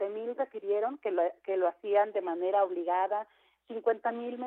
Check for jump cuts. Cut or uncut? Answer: uncut